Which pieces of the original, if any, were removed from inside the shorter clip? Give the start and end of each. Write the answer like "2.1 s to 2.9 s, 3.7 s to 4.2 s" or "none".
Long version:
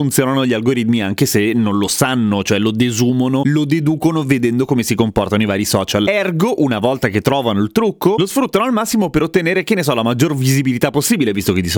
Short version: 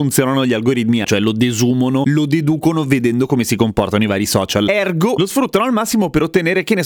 1.0 s to 2.4 s, 6.6 s to 8.2 s